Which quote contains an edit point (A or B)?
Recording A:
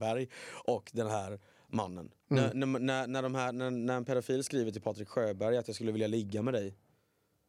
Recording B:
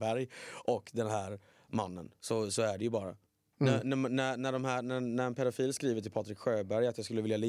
A